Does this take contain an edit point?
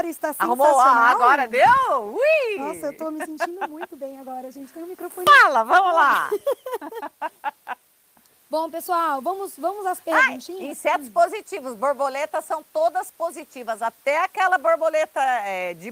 no; 0 cuts

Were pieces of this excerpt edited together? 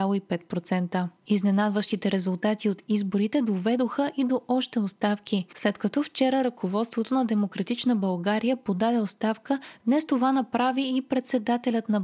no; 0 cuts

